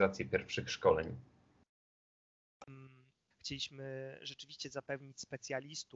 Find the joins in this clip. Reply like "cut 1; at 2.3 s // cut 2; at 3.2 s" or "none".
cut 1; at 3.3 s